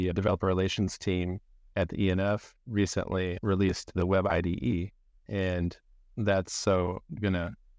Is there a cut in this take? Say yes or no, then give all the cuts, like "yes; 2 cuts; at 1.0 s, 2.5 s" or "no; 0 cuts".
yes; 1 cut; at 3.4 s